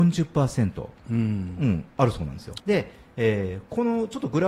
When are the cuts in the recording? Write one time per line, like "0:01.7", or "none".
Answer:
0:02.6